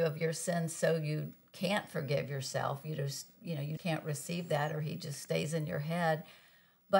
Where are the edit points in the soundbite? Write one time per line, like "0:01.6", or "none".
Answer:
0:03.8